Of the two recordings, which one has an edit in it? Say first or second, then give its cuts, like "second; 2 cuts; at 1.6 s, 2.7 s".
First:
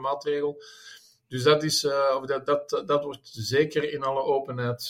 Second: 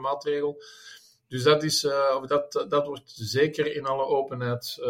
second; 1 cut; at 2.3 s